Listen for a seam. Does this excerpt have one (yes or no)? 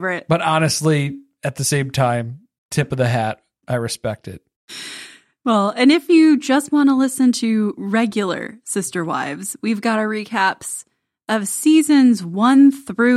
no